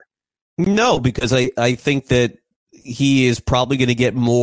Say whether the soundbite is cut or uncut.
uncut